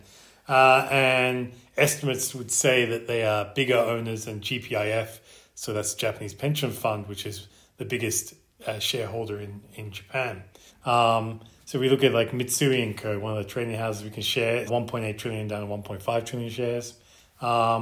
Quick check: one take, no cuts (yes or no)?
no